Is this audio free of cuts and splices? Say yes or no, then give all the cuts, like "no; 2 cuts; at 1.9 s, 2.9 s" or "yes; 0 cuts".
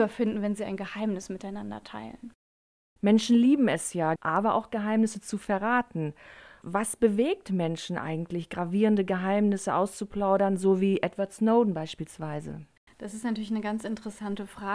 no; 1 cut; at 4.2 s